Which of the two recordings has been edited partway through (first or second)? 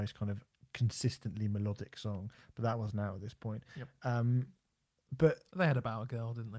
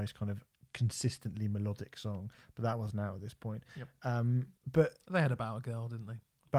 second